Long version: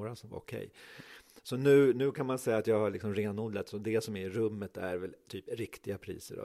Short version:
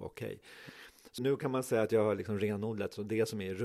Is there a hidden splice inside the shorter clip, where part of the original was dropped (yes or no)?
yes